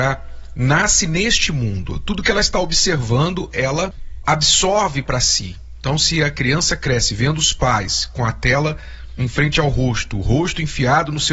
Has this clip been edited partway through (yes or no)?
no